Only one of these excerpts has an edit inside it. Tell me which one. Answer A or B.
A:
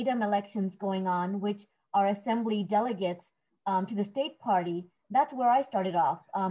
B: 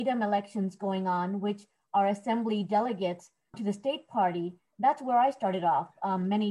B